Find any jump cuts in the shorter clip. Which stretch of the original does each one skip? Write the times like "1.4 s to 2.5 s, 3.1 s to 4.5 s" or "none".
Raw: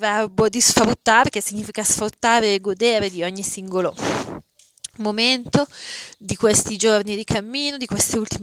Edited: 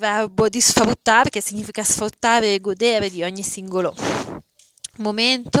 none